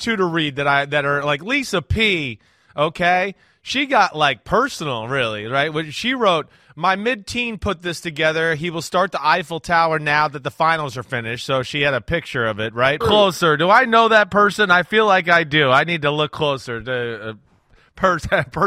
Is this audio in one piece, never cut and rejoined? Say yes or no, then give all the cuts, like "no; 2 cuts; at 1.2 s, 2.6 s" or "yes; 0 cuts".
no; 1 cut; at 13.0 s